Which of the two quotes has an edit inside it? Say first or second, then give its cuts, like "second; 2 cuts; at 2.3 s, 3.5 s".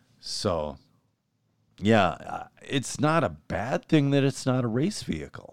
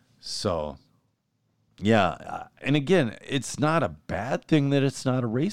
first; 1 cut; at 2.6 s